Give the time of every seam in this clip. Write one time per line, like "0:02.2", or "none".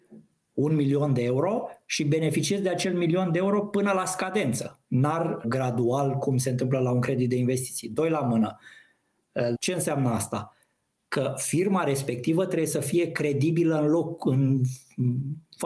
0:05.4
0:09.5